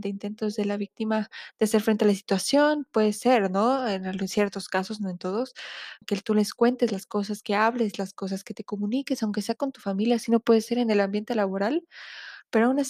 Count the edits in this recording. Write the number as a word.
one